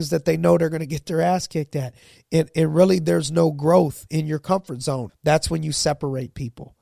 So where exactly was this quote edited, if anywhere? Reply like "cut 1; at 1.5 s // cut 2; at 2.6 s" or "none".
cut 1; at 5.1 s